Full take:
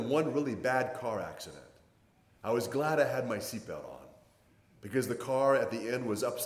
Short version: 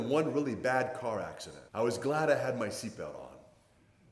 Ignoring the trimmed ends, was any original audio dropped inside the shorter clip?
yes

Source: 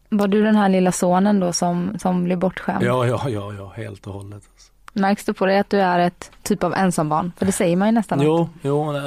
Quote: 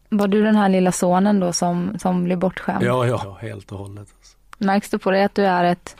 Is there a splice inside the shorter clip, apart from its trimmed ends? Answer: yes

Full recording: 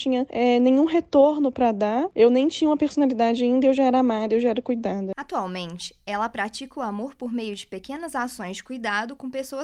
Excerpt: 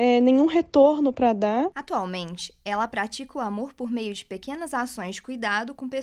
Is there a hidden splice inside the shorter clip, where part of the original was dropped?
yes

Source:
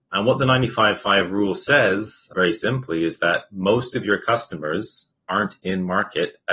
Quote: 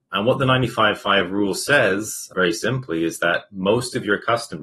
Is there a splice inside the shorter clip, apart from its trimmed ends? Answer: no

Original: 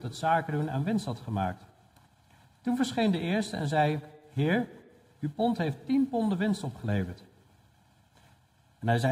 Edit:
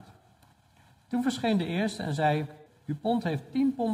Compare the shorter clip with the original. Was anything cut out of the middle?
yes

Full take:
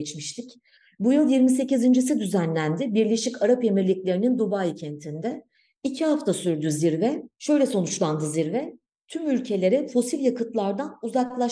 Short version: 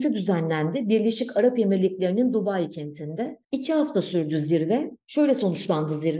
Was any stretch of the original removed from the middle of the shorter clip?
yes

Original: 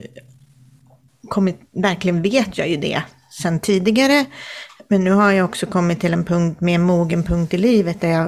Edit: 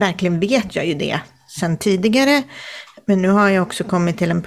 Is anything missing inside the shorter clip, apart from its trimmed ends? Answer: no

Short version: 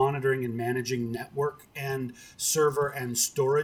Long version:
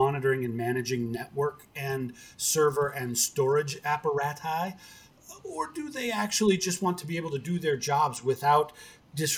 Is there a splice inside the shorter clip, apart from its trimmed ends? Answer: no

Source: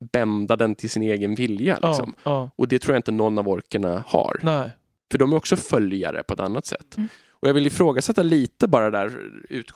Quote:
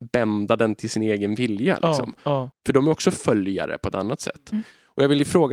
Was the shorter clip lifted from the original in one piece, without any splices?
no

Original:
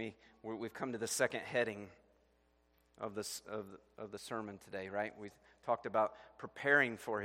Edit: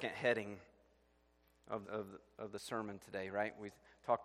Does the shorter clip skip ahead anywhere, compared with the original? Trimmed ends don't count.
yes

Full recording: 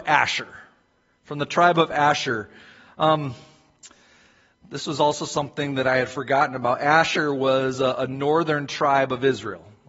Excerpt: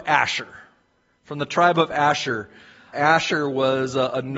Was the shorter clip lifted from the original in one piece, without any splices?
no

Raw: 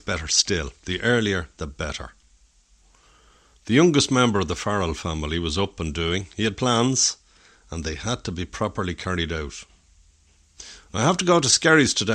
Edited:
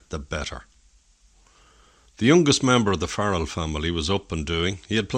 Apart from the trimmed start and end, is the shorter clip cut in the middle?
no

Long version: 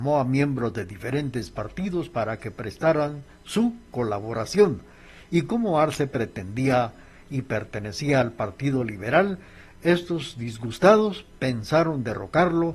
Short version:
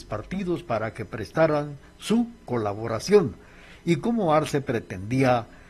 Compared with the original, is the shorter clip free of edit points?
yes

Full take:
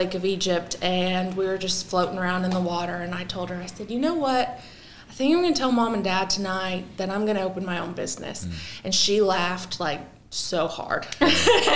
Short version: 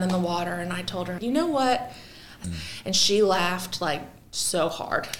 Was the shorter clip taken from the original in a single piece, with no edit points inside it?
no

